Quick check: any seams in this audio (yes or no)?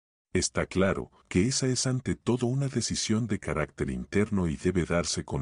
yes